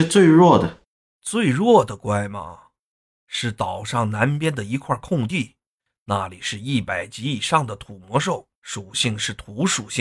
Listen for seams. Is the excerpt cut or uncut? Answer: cut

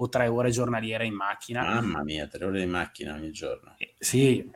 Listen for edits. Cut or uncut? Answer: uncut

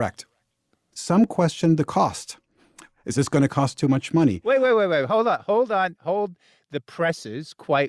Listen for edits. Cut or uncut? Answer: cut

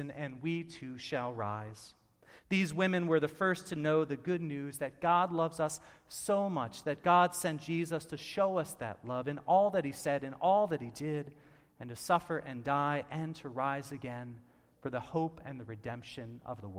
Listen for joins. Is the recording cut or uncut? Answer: uncut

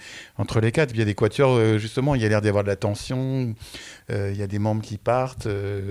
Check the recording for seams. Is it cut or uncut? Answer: uncut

